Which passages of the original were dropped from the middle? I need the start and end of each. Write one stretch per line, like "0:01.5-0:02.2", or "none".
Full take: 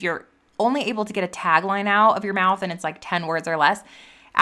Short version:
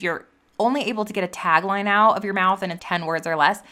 0:02.8-0:03.0